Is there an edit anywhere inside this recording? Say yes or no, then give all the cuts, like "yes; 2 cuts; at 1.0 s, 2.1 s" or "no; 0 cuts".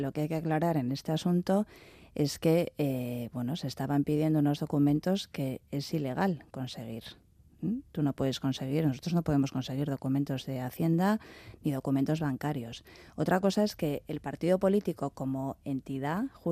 no; 0 cuts